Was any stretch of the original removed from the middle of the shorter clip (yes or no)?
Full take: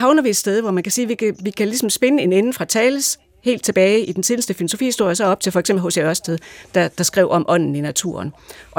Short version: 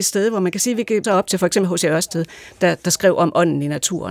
yes